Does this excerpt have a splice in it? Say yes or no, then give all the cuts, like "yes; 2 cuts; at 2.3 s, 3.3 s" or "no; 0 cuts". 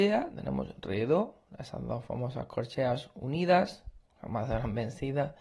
no; 0 cuts